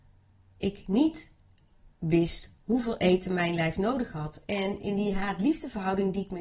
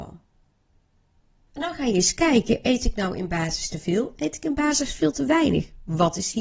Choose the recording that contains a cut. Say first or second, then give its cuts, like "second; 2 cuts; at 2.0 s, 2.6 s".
second; 1 cut; at 1.5 s